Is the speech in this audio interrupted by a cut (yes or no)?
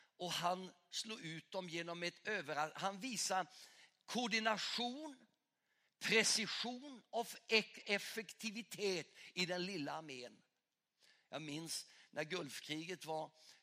no